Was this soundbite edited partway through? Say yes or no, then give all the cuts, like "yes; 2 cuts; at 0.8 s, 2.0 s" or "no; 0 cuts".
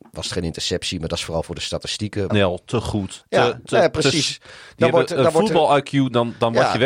yes; 1 cut; at 2.3 s